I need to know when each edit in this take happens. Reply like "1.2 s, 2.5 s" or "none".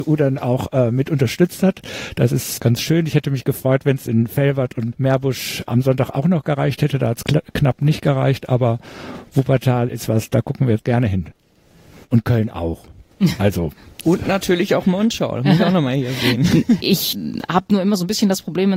16.8 s